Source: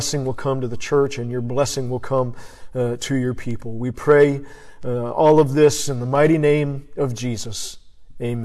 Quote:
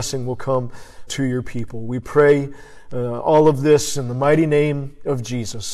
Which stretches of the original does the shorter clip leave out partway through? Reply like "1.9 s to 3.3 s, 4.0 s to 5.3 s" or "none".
2.7 s to 3.0 s